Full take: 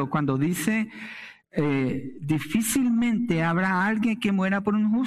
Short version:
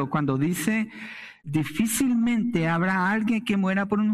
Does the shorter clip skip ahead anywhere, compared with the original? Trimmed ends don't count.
yes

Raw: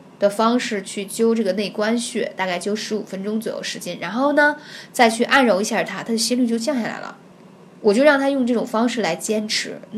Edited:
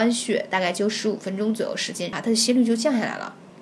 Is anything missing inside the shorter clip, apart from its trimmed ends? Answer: yes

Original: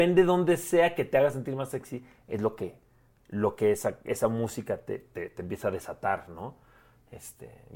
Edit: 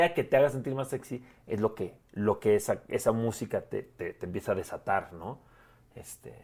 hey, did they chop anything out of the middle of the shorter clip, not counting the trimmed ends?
yes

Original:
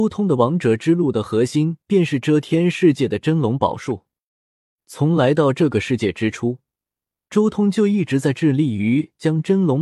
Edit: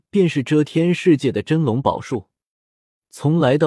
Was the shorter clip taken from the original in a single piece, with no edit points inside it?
yes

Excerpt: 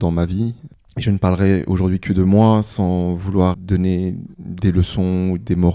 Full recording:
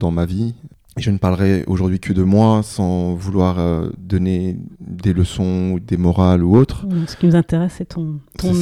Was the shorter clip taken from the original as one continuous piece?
no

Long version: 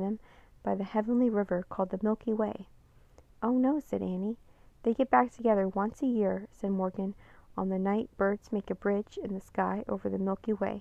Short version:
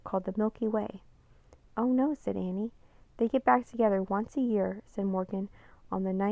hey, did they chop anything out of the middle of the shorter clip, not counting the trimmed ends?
no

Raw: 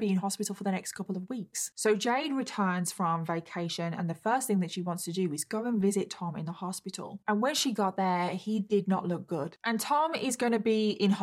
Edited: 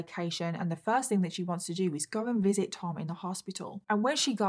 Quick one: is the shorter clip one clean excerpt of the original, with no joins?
yes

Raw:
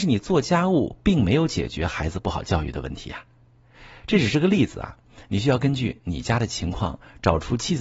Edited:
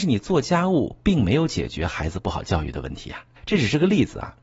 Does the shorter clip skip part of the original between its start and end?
yes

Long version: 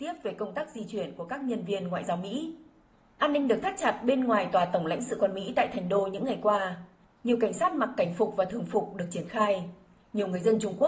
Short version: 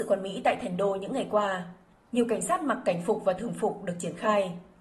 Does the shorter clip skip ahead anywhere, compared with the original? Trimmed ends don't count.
no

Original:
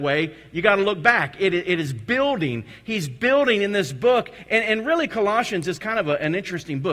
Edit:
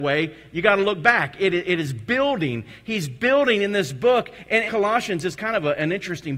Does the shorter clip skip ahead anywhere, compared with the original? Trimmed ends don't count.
yes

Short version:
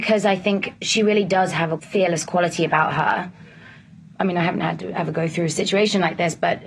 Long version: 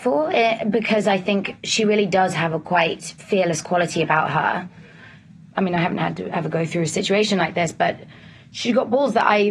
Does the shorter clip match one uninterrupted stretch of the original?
no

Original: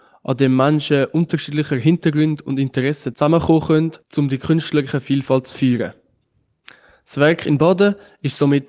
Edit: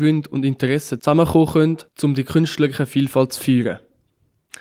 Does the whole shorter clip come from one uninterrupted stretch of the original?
yes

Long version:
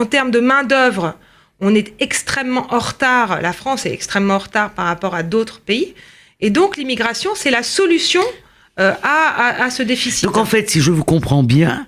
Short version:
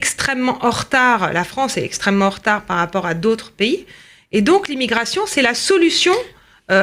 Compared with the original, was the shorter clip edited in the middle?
no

